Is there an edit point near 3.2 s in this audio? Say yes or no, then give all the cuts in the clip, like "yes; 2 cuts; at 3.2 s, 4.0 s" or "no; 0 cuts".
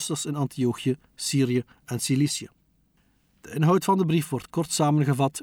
no; 0 cuts